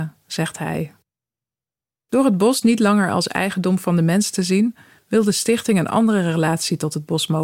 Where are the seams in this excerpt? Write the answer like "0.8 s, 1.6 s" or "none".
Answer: none